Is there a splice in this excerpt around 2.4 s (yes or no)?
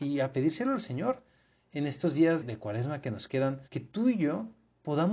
yes